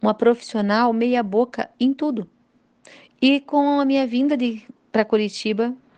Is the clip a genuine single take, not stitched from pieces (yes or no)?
no